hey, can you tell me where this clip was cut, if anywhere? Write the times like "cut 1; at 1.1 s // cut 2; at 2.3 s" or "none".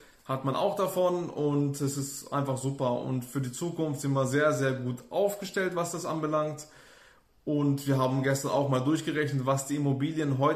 none